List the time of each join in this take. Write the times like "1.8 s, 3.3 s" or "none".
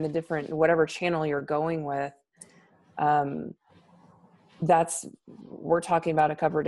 none